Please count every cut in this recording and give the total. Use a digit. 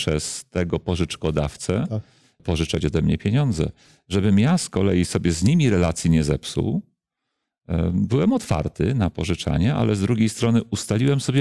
1